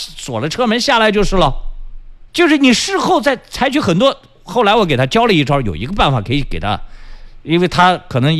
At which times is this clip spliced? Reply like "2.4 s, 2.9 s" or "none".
2.3 s